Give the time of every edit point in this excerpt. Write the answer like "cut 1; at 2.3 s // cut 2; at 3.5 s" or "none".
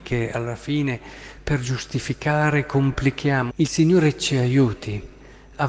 cut 1; at 3.5 s